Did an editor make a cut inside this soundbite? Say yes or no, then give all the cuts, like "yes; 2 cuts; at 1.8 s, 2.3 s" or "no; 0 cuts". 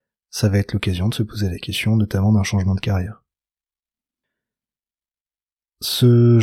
no; 0 cuts